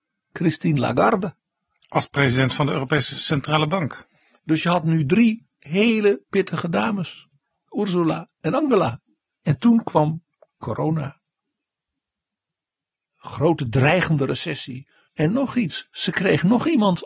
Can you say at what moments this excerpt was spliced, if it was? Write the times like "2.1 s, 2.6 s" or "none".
7.7 s, 9.3 s, 15.1 s